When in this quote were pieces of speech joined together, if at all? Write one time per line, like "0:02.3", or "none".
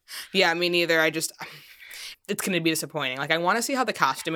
0:02.1